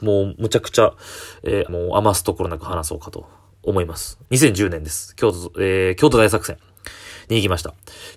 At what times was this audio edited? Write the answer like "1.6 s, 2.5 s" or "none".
1.7 s, 4.3 s